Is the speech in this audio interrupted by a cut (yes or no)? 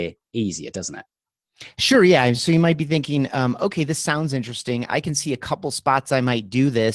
no